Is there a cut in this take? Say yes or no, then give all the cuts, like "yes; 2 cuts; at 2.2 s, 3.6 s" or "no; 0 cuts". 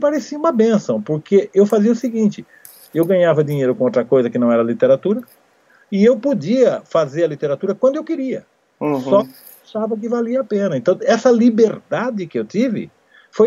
no; 0 cuts